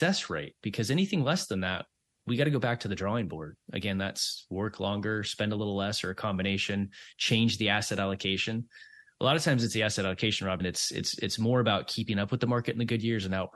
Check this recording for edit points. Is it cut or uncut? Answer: cut